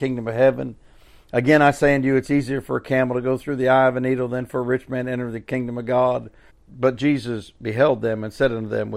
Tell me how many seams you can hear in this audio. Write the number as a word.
one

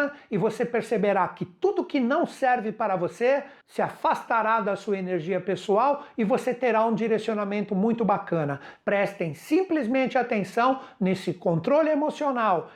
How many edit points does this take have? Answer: one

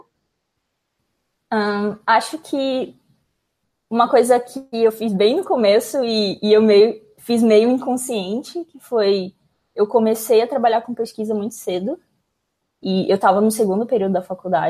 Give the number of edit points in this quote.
zero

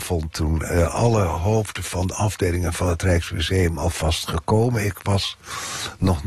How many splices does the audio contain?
zero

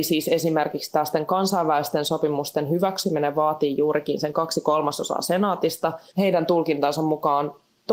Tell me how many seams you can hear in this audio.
one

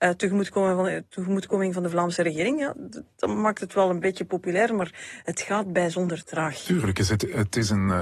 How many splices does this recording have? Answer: zero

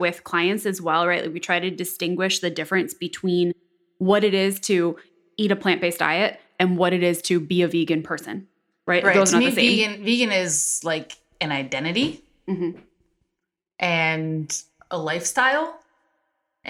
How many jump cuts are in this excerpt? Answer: zero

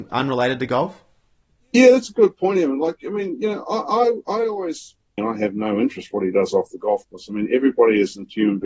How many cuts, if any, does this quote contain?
one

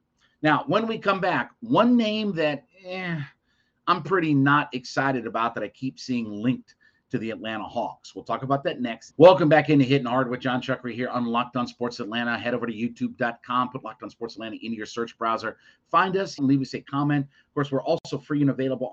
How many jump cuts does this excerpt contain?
two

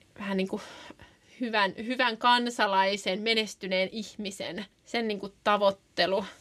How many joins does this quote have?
one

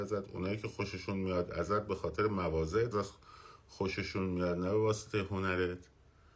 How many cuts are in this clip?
one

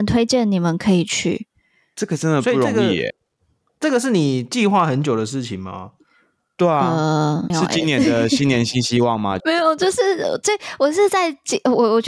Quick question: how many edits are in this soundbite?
two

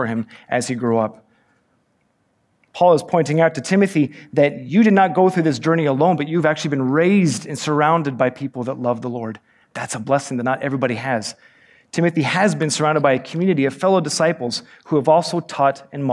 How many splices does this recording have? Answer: zero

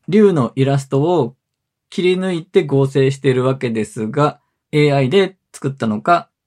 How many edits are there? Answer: one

